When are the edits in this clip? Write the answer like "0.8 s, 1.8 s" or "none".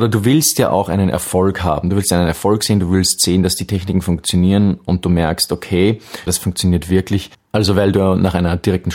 6.3 s, 7.3 s